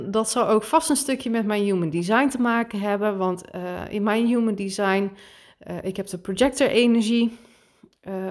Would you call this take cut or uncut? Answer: uncut